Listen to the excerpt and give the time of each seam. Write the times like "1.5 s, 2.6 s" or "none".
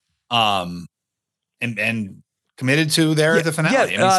none